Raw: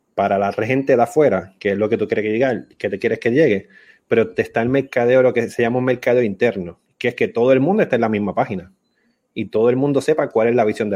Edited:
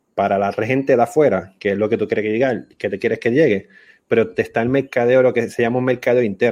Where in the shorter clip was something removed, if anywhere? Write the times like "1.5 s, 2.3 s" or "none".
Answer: none